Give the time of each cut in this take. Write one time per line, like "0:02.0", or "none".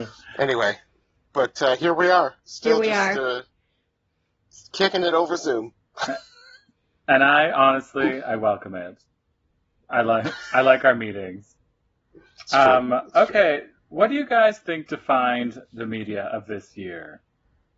none